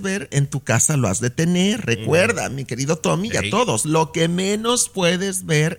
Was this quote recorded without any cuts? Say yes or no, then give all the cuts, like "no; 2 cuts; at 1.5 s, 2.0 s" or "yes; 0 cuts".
yes; 0 cuts